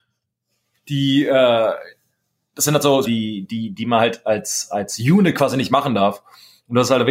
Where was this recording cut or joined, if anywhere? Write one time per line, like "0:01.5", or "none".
0:03.0